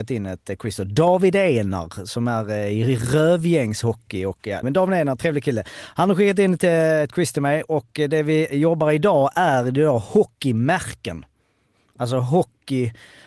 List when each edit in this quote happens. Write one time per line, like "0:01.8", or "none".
0:04.6